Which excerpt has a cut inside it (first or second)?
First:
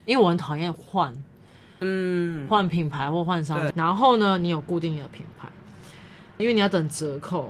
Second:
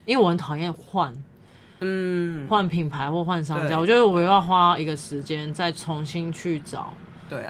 first